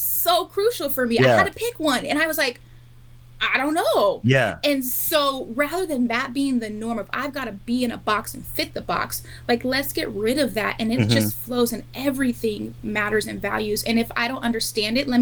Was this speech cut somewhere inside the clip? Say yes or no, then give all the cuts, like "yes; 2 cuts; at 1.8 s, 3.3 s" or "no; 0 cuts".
no; 0 cuts